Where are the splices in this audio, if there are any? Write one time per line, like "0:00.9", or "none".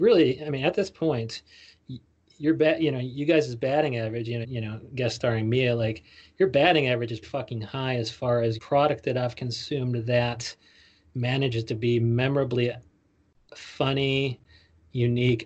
0:04.4
0:07.2
0:08.6